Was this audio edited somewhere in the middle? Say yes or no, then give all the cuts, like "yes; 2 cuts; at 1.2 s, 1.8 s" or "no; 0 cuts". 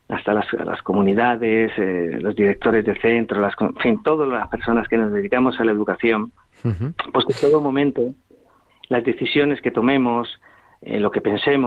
no; 0 cuts